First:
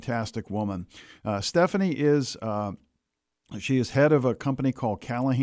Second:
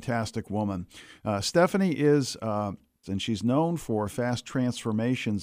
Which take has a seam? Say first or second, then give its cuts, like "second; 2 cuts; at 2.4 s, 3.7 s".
second; 1 cut; at 3.0 s